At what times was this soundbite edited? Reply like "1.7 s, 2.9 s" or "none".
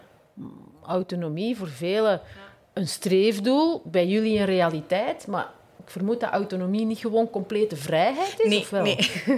none